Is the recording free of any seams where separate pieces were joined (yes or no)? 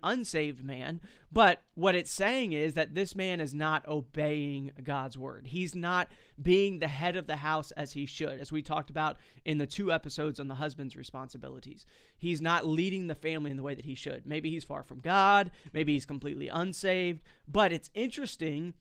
yes